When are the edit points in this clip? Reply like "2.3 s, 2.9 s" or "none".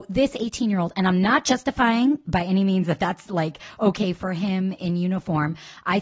none